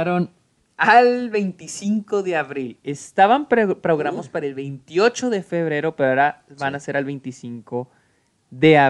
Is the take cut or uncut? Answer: uncut